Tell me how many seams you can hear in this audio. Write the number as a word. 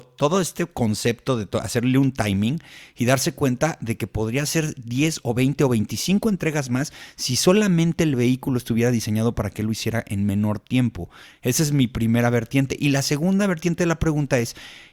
zero